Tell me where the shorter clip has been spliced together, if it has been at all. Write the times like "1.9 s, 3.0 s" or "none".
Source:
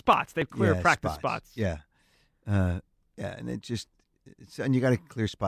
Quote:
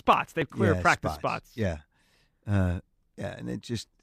none